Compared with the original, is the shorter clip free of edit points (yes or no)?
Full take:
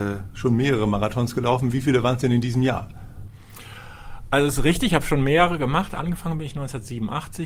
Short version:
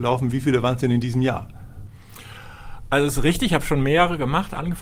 yes